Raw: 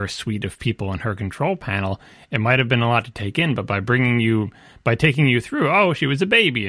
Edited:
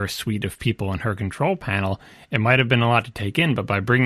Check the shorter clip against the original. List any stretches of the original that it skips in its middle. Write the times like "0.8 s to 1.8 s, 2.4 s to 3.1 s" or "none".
none

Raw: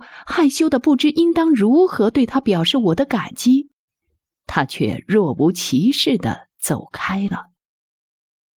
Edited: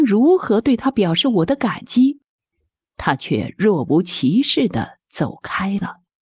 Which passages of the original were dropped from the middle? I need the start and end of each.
none

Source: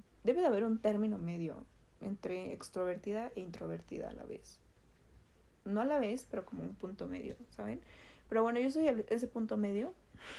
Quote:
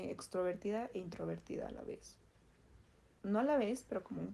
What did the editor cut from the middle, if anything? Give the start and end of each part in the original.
none

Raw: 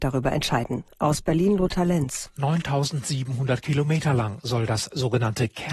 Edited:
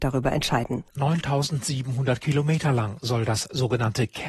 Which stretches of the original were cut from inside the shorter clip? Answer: 0.9 s to 2.3 s

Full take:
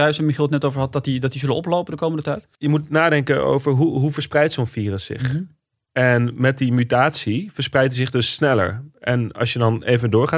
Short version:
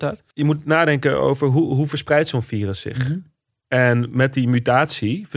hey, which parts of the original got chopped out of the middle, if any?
none

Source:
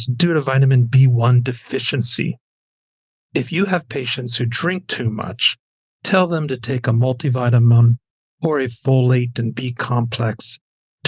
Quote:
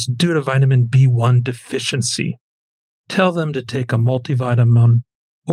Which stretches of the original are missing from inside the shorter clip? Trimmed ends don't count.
3.0 s to 5.9 s

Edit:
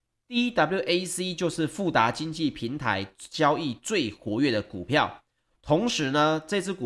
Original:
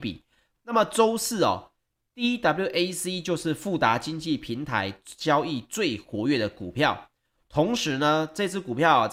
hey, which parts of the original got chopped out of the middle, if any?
none

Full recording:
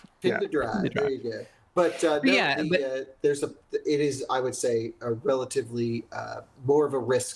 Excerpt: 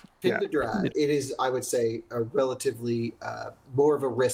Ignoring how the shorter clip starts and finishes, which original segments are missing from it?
0.9 s to 3.8 s

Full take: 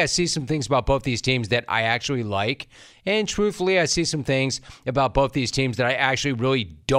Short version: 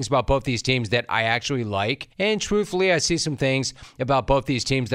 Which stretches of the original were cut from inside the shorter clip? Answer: 2.7 s to 3.0 s

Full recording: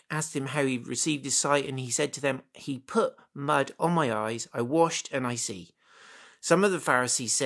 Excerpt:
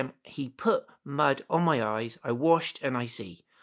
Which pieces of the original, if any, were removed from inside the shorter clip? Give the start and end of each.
none

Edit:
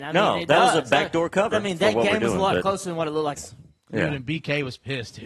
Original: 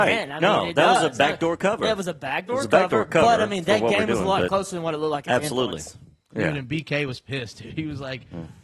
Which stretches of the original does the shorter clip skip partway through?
1.8 s to 3.4 s, 5.2 s to 5.8 s

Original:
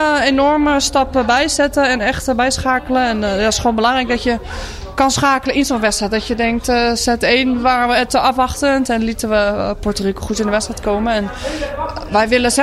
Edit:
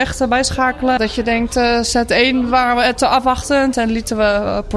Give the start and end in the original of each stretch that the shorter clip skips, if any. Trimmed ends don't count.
3.0 s to 6.1 s

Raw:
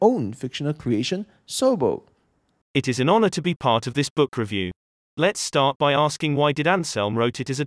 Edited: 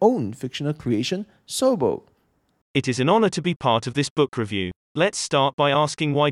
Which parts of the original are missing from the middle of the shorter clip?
4.8 s to 5.0 s

